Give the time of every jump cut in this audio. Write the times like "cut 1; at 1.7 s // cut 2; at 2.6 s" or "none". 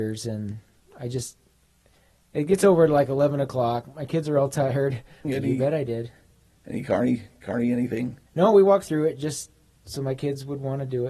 cut 1; at 5.2 s // cut 2; at 8.3 s